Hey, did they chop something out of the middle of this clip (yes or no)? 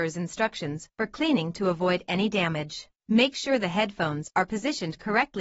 yes